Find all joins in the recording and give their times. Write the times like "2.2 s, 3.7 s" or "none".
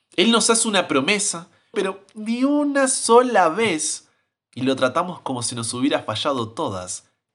1.7 s